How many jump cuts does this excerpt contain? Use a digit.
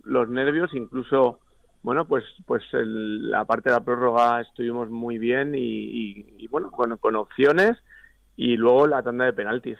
0